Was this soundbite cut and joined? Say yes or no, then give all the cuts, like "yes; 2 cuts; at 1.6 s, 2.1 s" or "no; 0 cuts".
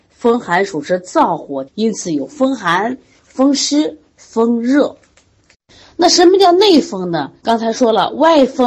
yes; 2 cuts; at 1.7 s, 7.4 s